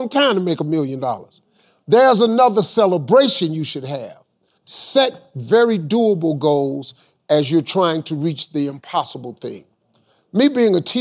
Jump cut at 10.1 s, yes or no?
no